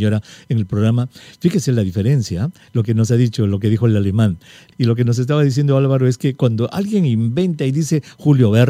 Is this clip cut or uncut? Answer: cut